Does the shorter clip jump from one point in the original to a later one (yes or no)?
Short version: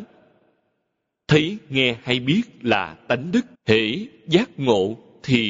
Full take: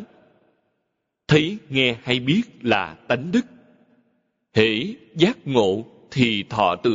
yes